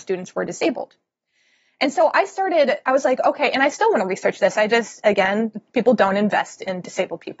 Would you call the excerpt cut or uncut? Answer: uncut